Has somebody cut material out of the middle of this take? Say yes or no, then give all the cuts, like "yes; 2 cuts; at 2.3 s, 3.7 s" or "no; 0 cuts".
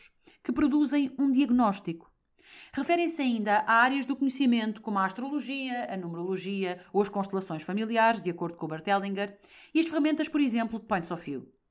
no; 0 cuts